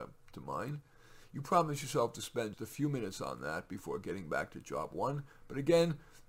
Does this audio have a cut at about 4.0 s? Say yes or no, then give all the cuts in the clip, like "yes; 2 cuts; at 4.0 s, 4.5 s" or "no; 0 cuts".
no; 1 cut; at 2.5 s